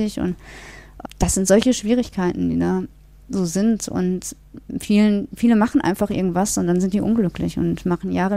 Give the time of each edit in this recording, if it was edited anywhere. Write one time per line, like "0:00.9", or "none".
0:01.0